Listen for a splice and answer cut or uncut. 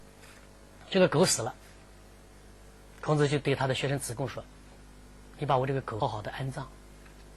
cut